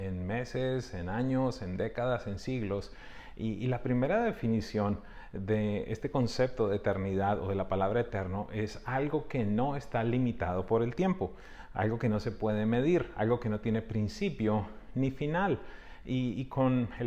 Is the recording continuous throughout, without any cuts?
yes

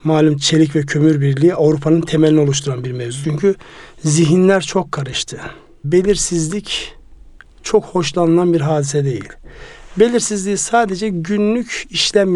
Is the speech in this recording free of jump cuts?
no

